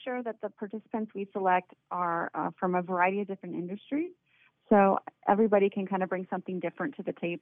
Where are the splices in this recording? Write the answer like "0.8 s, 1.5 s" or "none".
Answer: 5.2 s